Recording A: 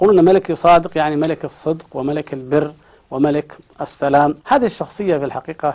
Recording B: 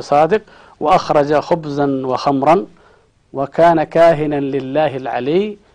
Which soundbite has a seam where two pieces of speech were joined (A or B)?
A